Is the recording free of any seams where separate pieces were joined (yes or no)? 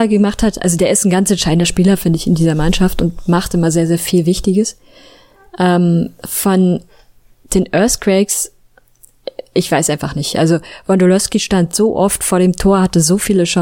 yes